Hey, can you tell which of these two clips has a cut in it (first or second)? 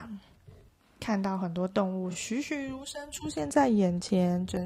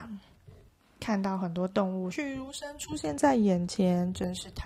second